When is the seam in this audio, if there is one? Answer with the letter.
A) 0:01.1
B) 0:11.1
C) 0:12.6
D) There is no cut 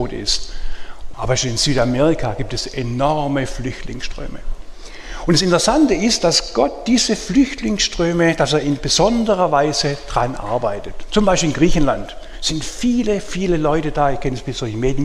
A